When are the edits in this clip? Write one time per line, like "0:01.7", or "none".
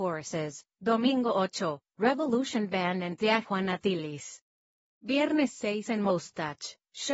0:04.9

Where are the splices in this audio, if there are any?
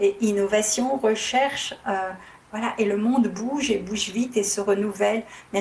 none

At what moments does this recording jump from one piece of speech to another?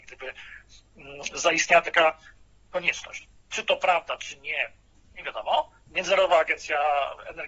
0:03.4
0:05.9

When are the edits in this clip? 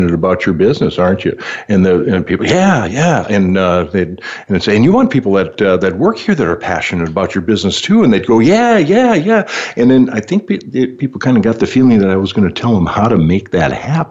none

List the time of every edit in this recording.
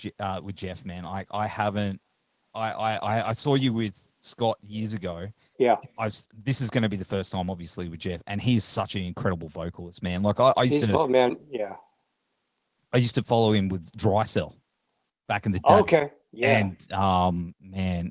0:05.5

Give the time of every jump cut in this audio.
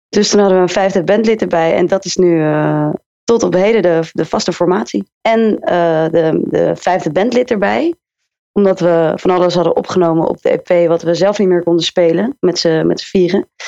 0:05.2

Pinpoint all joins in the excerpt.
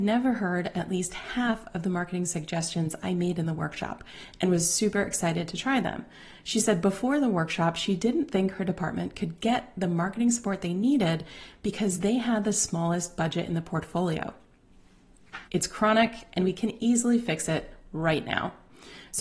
0:15.4

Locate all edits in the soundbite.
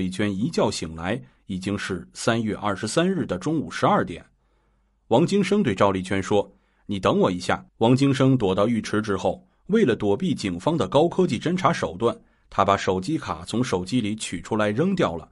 0:07.7

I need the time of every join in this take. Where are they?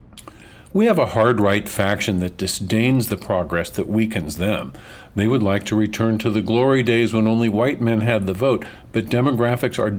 none

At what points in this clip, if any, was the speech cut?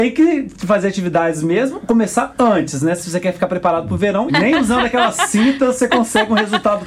0:04.3

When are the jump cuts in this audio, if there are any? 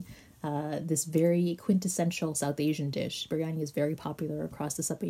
none

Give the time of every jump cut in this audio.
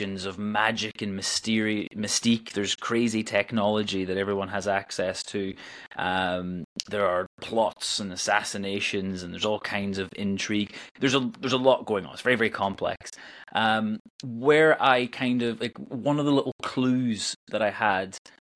none

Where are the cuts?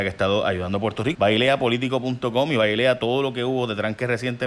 0:01.1

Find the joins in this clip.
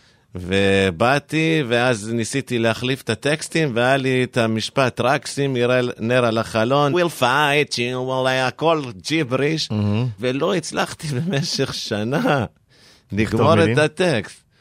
0:06.9
0:10.2

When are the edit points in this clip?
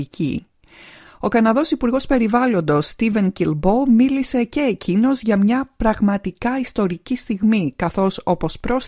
none

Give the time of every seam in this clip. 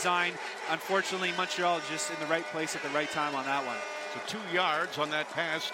0:04.2

